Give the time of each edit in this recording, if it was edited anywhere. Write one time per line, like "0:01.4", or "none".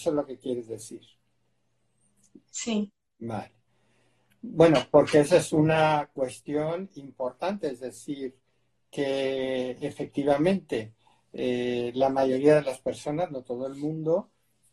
none